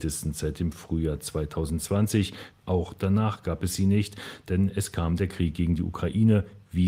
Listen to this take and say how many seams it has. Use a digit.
1